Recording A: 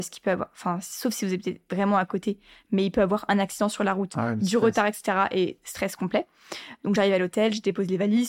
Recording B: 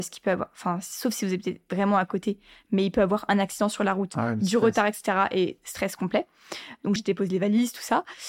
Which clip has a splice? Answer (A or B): B